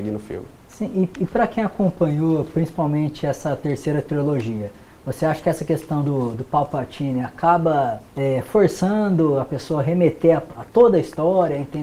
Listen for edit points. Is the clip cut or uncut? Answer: cut